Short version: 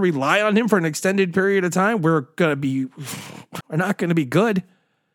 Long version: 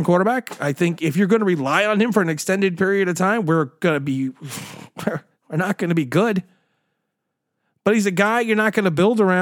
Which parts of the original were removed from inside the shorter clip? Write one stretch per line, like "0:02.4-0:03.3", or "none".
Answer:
0:05.0-0:05.4